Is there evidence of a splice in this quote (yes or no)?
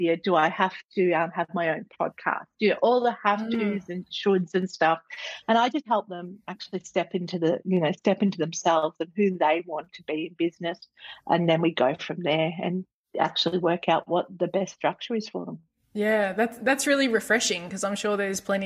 no